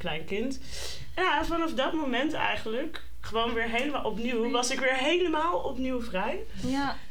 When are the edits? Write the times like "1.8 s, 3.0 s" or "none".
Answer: none